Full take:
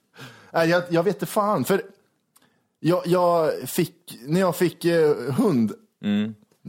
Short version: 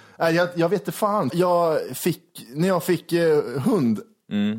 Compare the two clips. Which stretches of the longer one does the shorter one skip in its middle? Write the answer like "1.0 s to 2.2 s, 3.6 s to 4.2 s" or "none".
1.6 s to 3.0 s